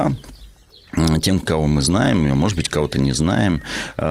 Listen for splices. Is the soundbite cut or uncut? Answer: cut